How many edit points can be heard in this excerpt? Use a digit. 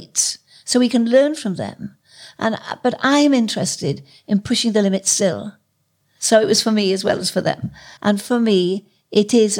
2